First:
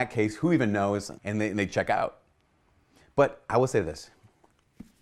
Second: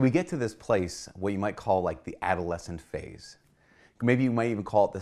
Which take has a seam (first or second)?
first